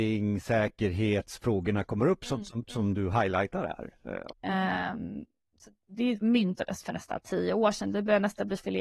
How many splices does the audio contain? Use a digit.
1